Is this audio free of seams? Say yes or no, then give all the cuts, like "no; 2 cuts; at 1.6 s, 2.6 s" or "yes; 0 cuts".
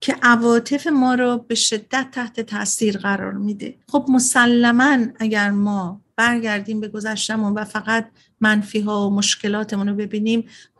no; 1 cut; at 3.8 s